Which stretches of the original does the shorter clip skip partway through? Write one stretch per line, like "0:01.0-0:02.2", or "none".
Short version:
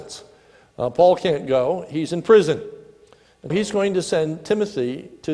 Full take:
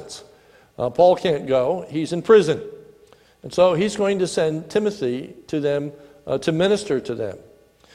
0:03.5-0:03.8